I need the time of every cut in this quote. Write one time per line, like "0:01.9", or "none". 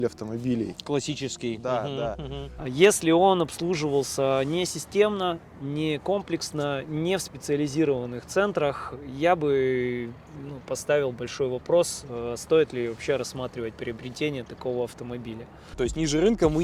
0:02.6
0:15.7